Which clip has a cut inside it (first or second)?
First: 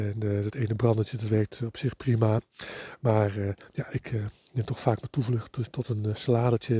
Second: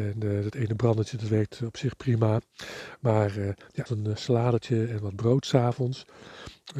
second